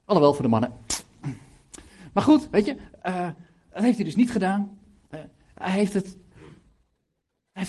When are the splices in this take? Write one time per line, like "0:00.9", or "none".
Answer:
none